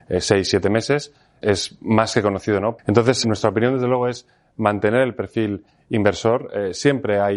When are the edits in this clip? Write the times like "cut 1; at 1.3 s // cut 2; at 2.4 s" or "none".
cut 1; at 2.8 s